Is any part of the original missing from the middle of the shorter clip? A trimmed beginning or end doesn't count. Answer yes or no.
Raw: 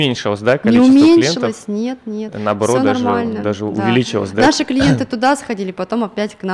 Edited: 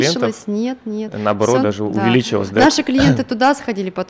yes